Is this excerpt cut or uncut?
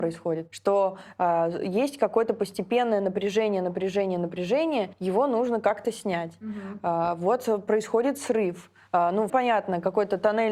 cut